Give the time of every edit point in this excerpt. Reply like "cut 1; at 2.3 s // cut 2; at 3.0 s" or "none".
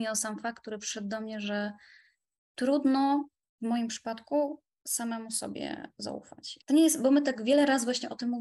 cut 1; at 6.6 s